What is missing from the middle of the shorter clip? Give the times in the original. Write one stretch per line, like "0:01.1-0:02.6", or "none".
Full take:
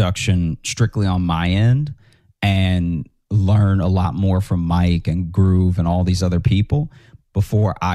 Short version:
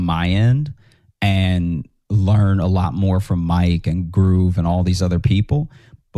none